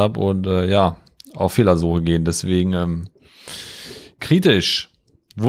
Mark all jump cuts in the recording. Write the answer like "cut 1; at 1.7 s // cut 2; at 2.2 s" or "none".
none